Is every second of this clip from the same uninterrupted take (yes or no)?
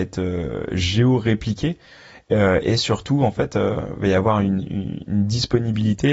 yes